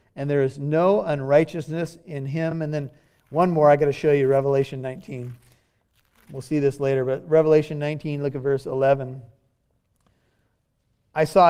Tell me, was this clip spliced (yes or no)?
no